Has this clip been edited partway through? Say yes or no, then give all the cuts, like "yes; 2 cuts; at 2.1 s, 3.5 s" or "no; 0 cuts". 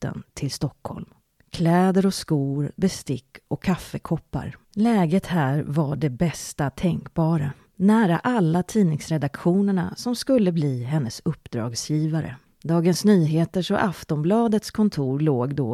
yes; 2 cuts; at 2.7 s, 4.6 s